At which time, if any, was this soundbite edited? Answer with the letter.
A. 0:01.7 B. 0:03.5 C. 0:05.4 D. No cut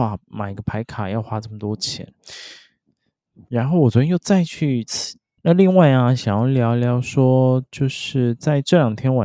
C